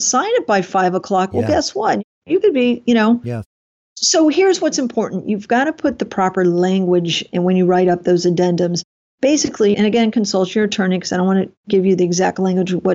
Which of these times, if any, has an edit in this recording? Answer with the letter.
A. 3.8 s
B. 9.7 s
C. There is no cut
B